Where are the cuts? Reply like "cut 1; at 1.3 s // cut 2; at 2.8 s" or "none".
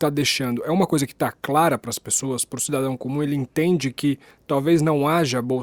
none

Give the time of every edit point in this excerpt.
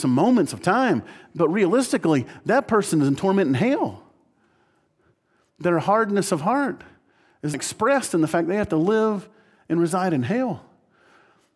cut 1; at 7.5 s

